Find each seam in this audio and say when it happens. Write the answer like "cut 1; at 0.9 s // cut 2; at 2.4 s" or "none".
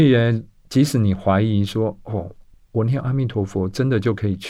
none